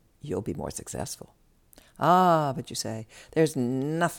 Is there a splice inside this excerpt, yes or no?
no